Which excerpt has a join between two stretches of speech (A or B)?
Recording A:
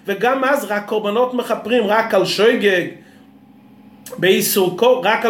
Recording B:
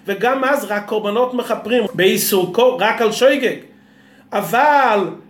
B